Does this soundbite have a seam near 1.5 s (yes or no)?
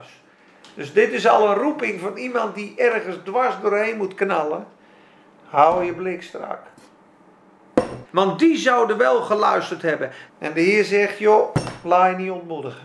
no